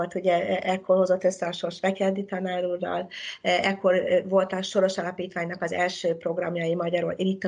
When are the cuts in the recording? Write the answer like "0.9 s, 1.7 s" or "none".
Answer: none